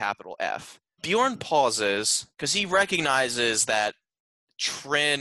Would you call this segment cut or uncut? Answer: cut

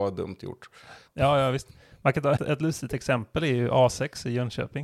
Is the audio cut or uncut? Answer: cut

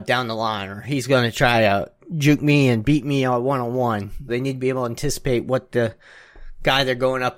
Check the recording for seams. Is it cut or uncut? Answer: cut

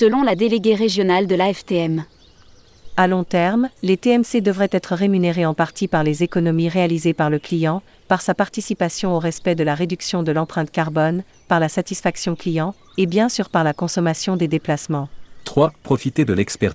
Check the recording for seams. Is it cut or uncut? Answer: uncut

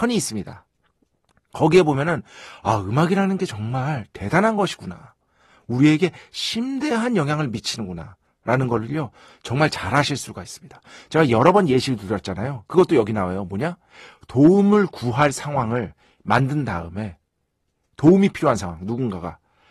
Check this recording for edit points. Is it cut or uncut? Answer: uncut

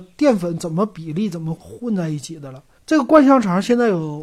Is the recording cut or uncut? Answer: cut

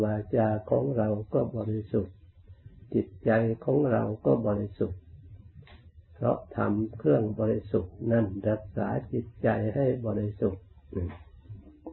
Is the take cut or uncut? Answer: uncut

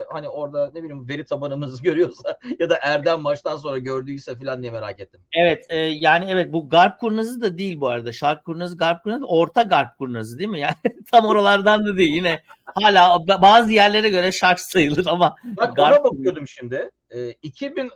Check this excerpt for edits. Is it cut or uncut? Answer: uncut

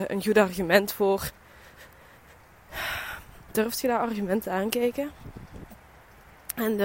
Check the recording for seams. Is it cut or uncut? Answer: uncut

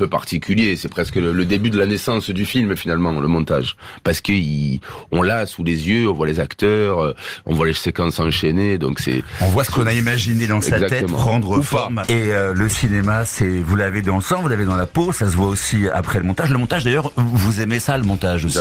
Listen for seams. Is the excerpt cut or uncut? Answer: cut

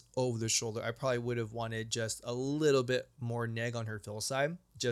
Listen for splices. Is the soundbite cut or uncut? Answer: uncut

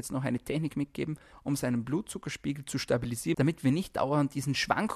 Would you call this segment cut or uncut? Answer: cut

